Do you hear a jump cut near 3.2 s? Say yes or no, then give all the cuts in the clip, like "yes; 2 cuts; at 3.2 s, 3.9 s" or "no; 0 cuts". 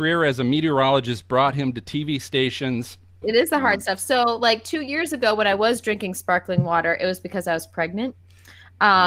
yes; 1 cut; at 3.2 s